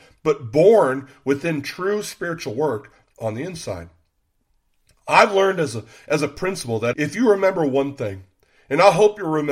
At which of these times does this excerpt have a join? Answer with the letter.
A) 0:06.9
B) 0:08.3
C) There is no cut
A